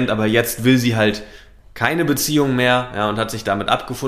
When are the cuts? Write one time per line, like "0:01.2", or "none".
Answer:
none